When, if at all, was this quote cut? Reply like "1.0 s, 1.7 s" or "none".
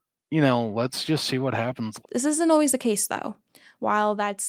2.0 s